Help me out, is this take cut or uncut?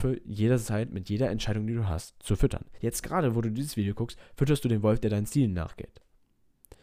uncut